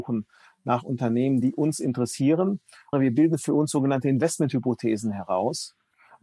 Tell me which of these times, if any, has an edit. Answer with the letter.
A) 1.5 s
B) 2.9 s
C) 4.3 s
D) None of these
B